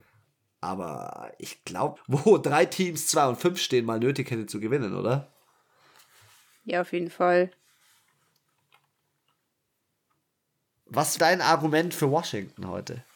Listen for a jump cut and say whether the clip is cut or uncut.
cut